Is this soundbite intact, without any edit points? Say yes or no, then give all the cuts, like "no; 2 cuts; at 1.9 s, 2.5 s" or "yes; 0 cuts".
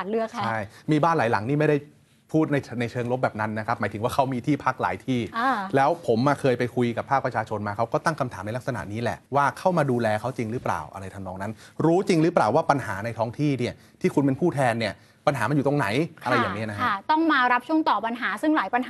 no; 1 cut; at 9.3 s